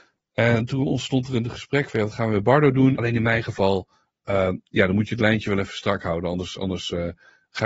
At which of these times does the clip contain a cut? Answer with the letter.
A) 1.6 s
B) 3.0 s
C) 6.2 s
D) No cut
B